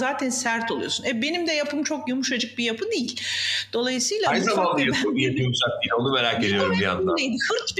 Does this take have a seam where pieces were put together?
no; 0 cuts

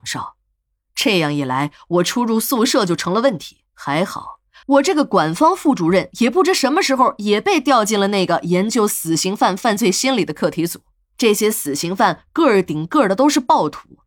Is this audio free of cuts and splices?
no; 2 cuts; at 3.7 s, 11.1 s

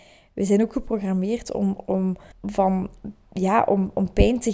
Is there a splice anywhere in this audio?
yes; 1 cut; at 2.3 s

